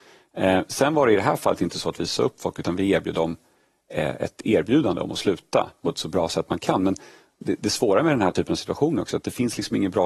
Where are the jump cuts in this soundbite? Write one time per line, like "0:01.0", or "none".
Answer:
0:05.8

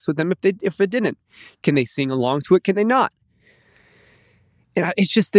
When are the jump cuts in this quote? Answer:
none

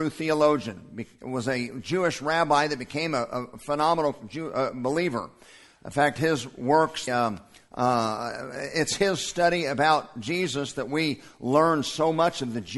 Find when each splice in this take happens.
0:07.1

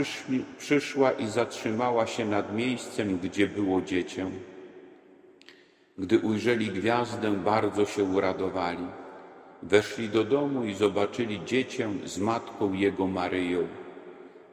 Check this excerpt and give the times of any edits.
none

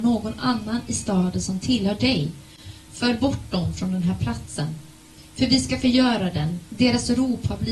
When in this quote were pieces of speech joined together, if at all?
none

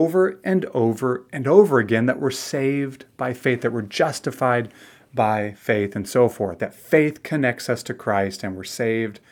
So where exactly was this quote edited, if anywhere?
0:06.6

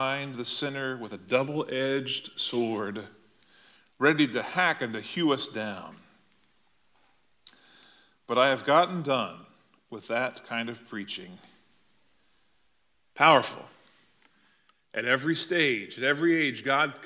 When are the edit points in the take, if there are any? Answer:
0:13.0

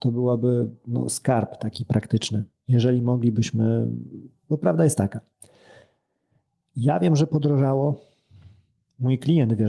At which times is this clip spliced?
none

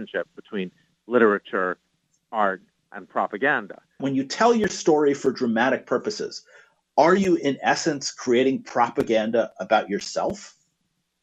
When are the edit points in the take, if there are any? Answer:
0:04.0

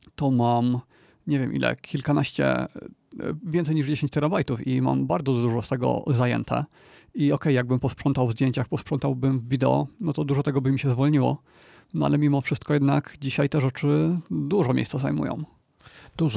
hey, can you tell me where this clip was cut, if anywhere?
none

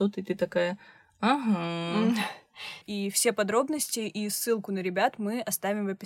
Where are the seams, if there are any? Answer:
0:02.8

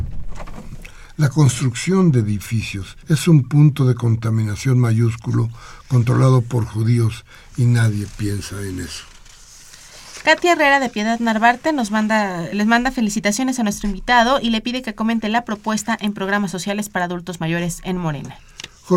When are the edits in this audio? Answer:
0:03.0
0:12.5

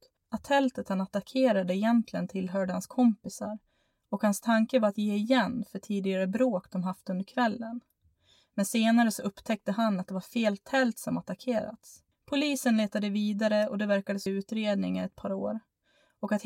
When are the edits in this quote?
0:12.1
0:14.3

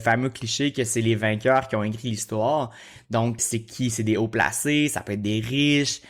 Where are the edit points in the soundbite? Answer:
0:03.4

